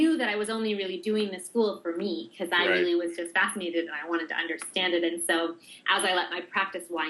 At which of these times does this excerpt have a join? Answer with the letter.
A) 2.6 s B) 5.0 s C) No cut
C